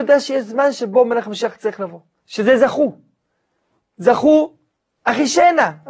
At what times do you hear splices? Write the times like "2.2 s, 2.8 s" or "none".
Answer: 2.2 s